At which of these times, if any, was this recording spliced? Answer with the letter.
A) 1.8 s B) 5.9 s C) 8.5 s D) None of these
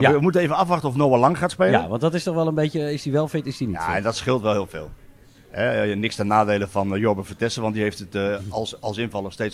D